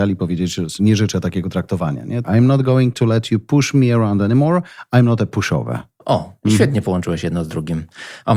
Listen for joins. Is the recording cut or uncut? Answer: cut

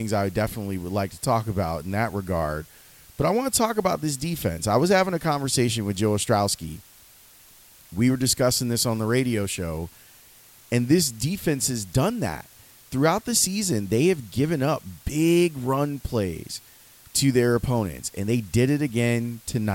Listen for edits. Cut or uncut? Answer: uncut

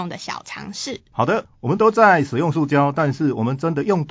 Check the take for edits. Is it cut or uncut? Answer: uncut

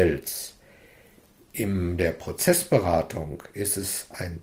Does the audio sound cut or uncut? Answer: uncut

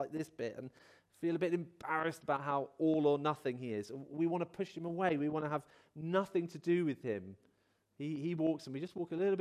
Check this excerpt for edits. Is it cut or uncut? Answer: uncut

